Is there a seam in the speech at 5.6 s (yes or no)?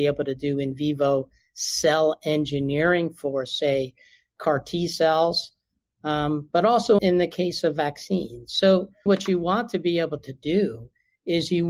no